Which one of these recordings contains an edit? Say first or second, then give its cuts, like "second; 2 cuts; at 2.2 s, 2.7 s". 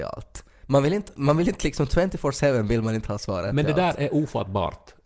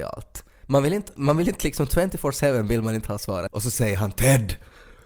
second; 1 cut; at 3.5 s